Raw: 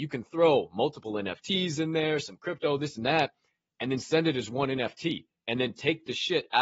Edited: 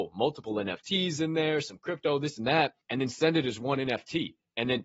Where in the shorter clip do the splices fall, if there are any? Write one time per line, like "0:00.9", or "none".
0:02.8